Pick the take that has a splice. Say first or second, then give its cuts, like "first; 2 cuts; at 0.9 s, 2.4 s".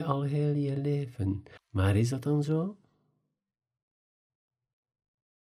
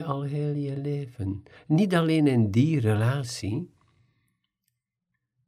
first; 1 cut; at 1.6 s